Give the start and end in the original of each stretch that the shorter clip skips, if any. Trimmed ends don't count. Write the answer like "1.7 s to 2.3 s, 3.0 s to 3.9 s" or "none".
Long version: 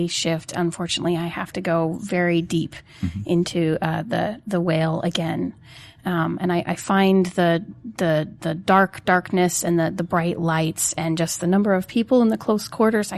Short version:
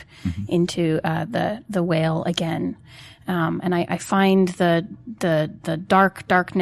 none